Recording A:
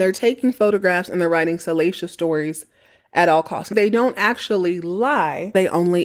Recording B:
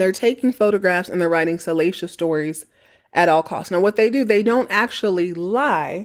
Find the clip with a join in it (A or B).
A